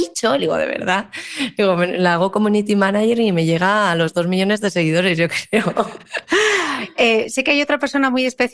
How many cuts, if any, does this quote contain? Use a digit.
0